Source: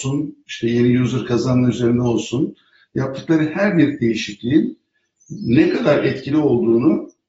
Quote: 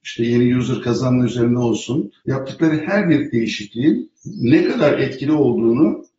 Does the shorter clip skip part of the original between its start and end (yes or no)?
yes